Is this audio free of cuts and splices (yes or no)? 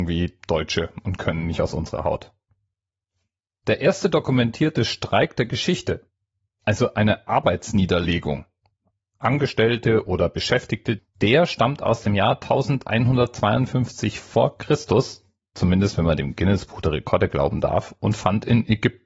no